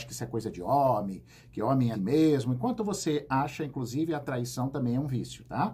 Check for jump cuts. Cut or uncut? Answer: cut